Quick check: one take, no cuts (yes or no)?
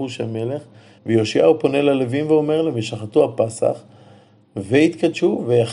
no